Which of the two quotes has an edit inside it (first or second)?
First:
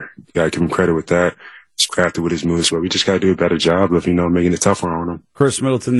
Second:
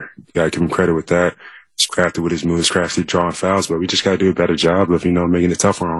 first